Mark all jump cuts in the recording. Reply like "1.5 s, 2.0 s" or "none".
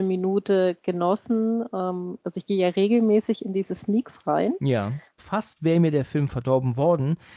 5.2 s